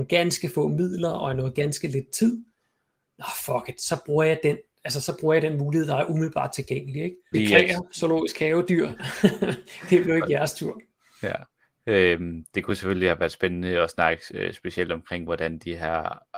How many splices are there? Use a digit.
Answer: 1